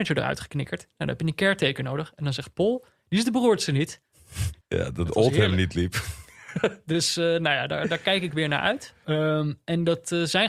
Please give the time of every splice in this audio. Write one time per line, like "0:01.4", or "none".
0:04.6
0:09.0